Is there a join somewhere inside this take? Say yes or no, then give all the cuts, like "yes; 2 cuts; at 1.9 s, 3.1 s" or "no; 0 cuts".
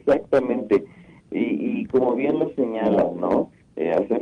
no; 0 cuts